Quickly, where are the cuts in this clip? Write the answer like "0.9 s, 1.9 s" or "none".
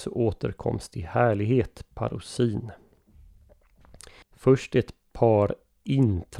4.2 s